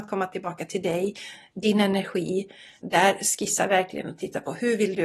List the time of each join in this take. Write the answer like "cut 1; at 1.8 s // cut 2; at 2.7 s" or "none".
cut 1; at 2.8 s